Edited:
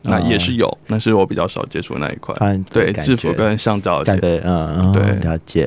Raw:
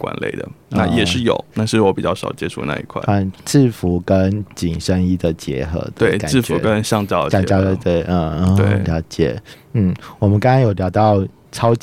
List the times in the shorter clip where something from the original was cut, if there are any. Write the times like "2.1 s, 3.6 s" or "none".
2.7 s, 4.2 s